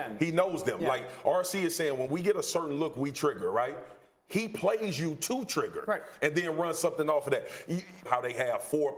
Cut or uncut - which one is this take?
cut